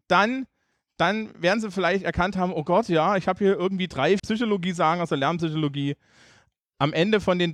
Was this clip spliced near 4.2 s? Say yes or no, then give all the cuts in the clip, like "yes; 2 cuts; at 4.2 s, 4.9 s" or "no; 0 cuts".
yes; 1 cut; at 4.2 s